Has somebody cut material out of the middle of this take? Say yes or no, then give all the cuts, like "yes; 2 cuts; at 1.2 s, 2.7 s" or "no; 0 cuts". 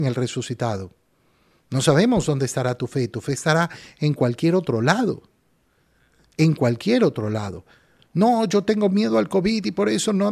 no; 0 cuts